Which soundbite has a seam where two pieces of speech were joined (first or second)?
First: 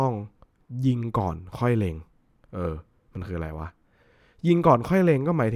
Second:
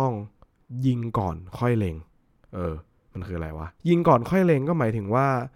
second